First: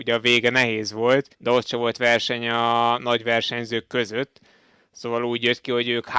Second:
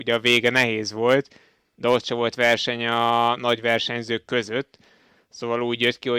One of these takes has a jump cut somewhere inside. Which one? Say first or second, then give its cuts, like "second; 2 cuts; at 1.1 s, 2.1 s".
first; 1 cut; at 1.3 s